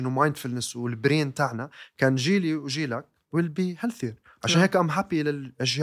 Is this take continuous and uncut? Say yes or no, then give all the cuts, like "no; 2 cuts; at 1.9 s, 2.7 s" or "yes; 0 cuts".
yes; 0 cuts